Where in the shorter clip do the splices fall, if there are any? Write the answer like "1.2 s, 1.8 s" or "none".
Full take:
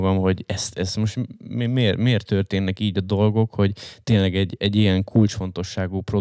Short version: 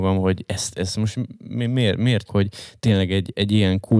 2.3 s